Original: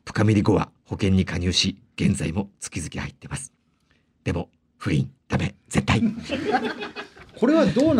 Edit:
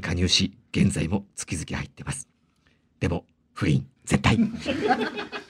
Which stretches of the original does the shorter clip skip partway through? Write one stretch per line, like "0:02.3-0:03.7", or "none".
0:05.2-0:05.6